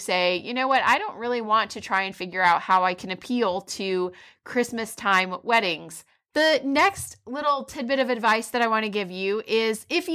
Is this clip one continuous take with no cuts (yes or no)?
no